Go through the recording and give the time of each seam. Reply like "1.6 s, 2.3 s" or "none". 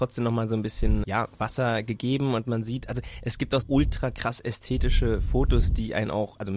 1.0 s, 3.6 s